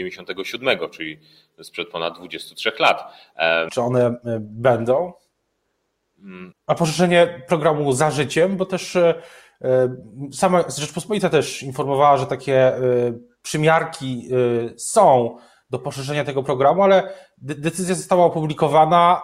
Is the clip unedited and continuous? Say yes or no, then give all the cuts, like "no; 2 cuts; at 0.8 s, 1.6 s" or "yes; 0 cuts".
no; 2 cuts; at 3.7 s, 6.5 s